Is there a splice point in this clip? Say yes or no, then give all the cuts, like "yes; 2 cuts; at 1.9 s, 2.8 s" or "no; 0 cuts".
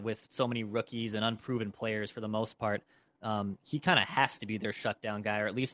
no; 0 cuts